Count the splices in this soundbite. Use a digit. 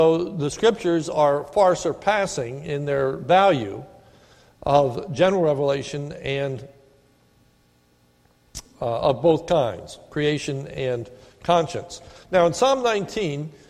0